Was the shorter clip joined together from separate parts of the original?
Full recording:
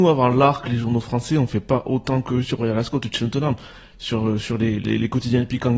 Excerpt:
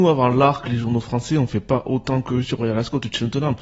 no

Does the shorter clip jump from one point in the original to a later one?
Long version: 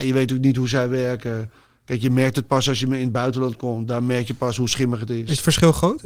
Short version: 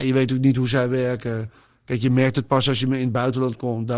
no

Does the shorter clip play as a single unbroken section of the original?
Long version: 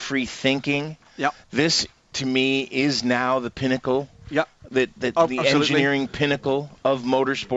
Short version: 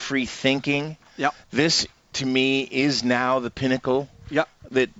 yes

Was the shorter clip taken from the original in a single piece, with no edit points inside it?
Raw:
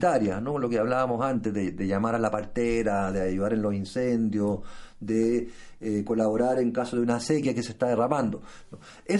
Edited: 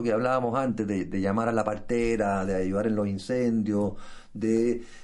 yes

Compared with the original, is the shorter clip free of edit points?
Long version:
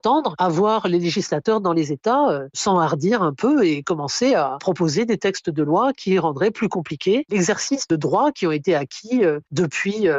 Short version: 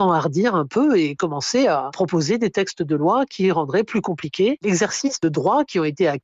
yes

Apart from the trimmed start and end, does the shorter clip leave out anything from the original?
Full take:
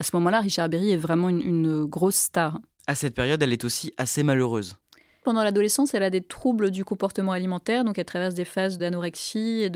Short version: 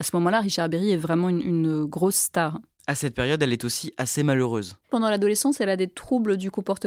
yes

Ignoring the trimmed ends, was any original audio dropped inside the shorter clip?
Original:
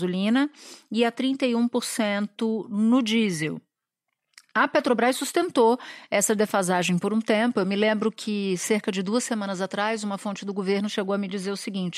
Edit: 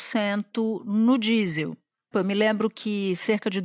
yes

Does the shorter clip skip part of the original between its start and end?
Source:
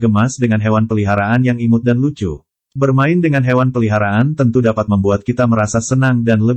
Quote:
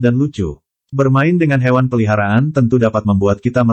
no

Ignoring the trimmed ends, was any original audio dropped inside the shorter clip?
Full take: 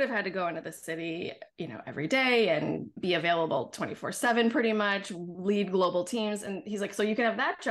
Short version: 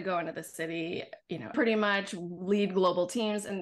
yes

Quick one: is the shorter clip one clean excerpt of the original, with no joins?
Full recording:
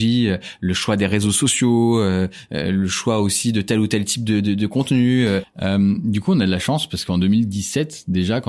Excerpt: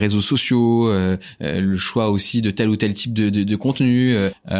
yes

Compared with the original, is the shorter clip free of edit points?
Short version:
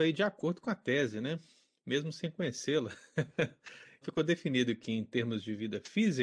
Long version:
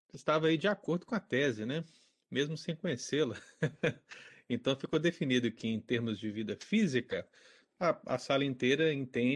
no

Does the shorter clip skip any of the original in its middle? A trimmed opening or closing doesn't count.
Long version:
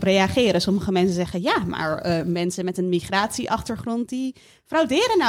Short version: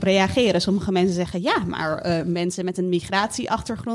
no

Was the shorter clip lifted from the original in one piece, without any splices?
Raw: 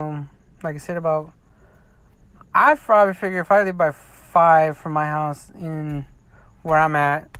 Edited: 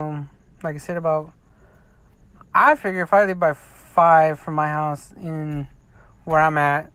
no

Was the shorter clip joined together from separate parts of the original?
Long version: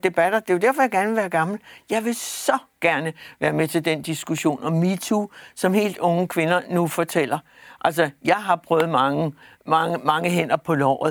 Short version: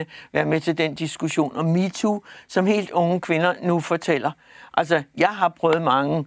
no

